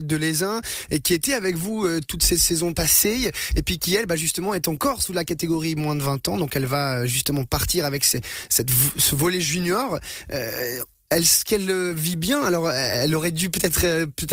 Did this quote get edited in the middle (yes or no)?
no